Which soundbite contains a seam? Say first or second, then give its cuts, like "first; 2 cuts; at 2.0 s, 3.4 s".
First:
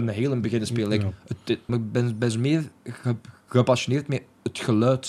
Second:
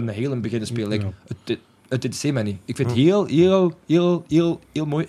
first; 1 cut; at 1.7 s